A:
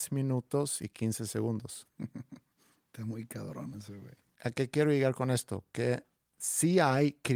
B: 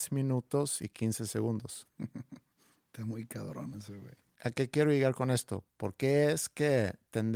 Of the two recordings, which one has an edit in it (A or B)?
B